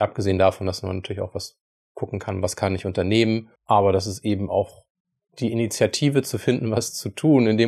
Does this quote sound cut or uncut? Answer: cut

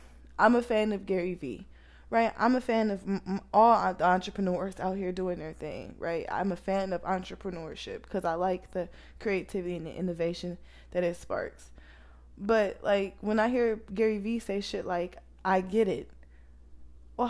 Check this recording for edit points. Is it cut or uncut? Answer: uncut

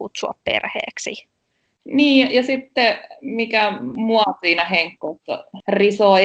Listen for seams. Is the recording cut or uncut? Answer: cut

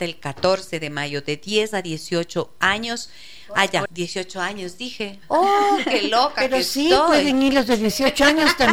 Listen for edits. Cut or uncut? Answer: cut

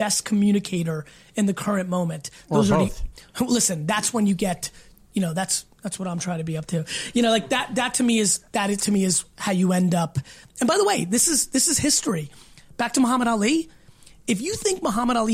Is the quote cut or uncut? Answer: uncut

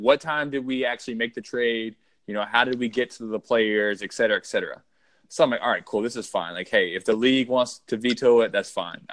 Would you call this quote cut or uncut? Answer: uncut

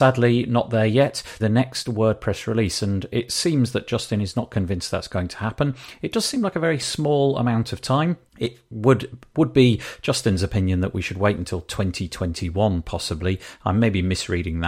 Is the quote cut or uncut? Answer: cut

